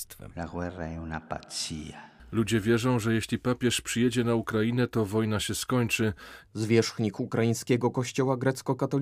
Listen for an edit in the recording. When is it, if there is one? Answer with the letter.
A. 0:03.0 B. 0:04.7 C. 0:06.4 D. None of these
C